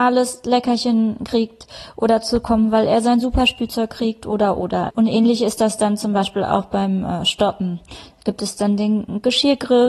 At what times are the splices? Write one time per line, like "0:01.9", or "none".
0:04.9